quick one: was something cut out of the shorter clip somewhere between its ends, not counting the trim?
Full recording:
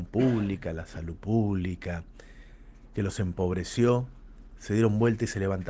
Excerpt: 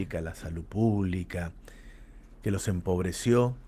no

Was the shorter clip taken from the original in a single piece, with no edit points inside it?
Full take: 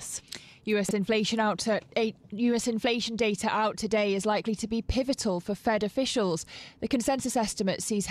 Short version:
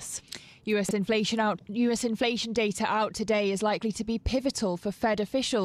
no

